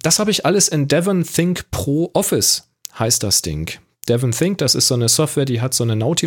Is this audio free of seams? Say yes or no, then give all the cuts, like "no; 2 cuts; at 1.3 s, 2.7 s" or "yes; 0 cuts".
yes; 0 cuts